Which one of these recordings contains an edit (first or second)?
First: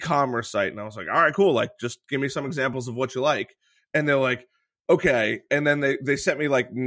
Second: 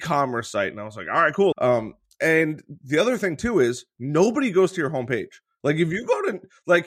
second